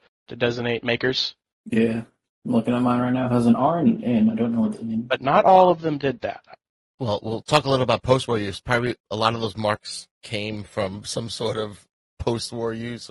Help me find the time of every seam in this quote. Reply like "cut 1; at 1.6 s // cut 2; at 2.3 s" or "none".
none